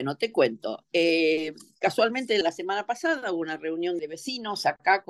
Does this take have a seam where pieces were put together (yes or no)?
yes